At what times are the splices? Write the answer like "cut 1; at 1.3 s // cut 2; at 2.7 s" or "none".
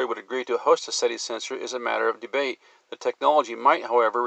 none